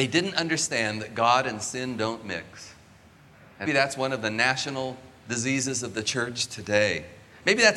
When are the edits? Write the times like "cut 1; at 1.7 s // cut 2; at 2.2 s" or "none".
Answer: cut 1; at 3.7 s